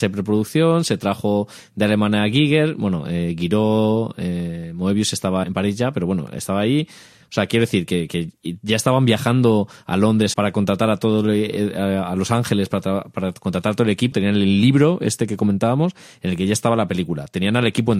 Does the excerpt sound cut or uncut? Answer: cut